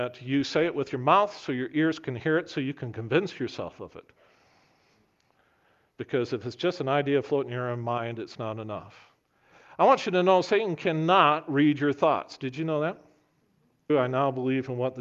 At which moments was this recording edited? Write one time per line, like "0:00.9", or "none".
0:13.9